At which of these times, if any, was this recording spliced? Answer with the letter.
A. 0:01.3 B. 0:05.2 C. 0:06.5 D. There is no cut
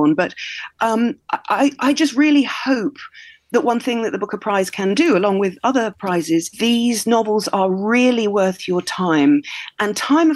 C